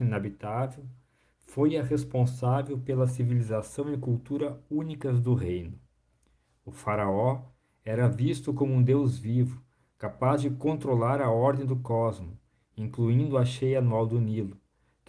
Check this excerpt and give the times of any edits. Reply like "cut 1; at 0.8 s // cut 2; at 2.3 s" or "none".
none